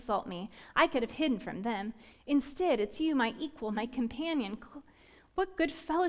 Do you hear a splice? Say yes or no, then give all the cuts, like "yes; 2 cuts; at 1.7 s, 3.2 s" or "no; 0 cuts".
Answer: yes; 1 cut; at 3.7 s